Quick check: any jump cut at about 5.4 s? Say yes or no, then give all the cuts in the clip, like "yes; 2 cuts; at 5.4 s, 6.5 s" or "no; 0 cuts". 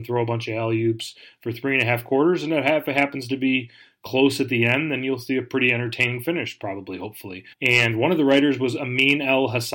no; 1 cut; at 7.5 s